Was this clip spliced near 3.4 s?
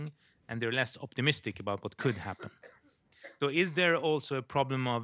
yes; 1 cut; at 3.4 s

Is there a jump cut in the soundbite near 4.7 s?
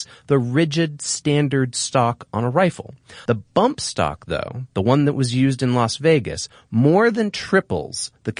no; 1 cut; at 3.3 s

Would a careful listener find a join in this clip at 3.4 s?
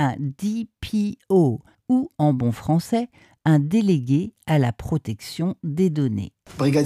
no; 1 cut; at 1.7 s

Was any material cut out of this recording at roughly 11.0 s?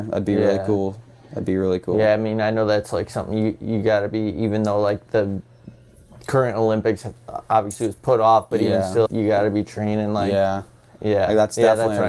yes; 2 cuts; at 9.1 s, 11.0 s

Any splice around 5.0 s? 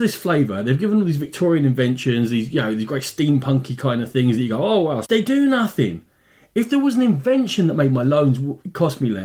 yes; 1 cut; at 5.0 s

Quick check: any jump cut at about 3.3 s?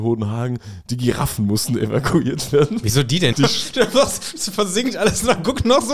yes; 1 cut; at 3.3 s

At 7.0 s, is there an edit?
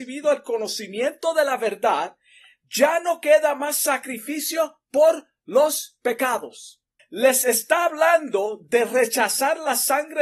yes; 1 cut; at 7.0 s

